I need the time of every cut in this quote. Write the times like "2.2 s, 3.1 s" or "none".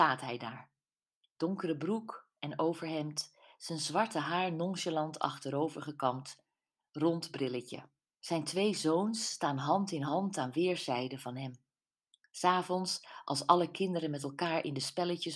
8.2 s

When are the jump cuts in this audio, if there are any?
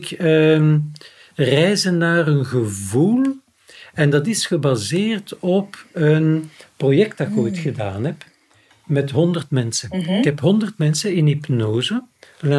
none

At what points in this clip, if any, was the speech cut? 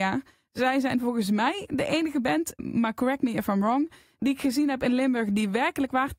2.6 s

